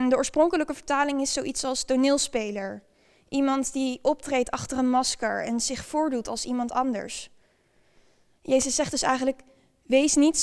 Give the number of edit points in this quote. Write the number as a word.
zero